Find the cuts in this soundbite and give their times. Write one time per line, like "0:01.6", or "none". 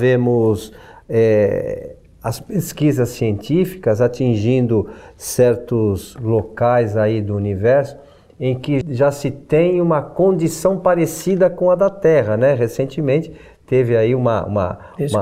0:08.8